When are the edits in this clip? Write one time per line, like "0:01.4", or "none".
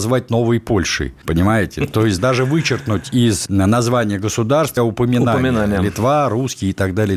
0:02.2
0:04.8